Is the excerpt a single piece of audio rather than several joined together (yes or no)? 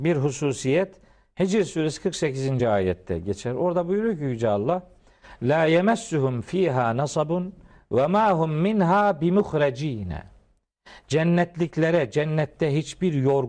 yes